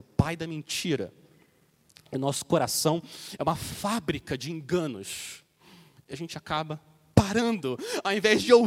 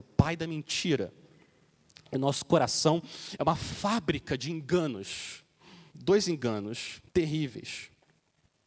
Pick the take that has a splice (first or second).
second